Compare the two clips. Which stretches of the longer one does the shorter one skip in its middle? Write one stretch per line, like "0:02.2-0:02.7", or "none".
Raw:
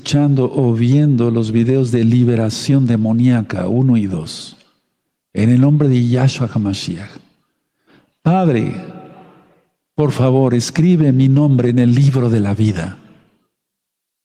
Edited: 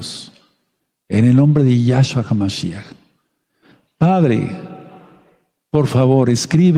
none